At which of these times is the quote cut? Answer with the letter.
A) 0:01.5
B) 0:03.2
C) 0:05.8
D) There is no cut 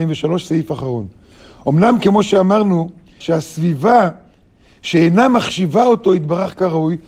B